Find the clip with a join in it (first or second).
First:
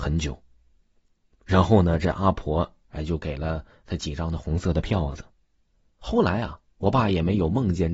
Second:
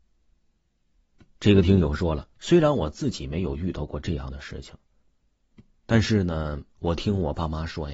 first